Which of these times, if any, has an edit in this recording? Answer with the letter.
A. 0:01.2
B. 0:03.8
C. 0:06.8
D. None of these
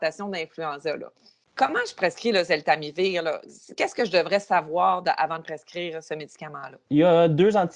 C